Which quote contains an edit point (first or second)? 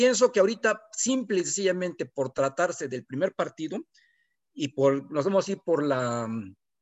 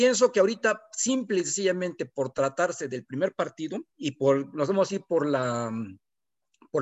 second